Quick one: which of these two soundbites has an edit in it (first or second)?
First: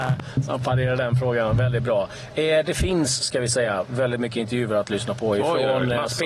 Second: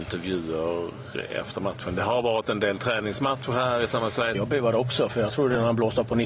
second